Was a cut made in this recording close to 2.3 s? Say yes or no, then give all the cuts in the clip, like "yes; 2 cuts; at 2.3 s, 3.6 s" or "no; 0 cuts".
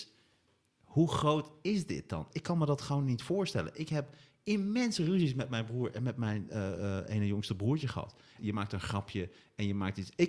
yes; 2 cuts; at 2.3 s, 8.4 s